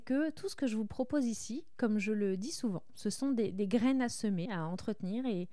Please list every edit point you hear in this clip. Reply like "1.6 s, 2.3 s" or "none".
4.5 s